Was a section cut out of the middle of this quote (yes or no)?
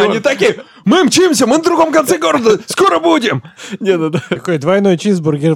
no